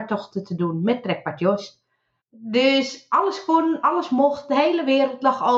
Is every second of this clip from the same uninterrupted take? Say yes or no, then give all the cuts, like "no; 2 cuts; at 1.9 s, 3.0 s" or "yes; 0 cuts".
no; 1 cut; at 2.2 s